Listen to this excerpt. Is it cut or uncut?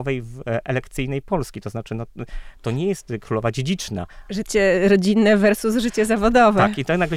uncut